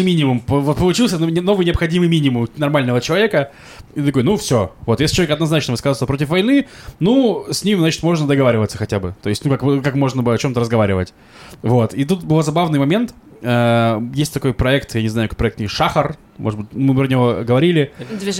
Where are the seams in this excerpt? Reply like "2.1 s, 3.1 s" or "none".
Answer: none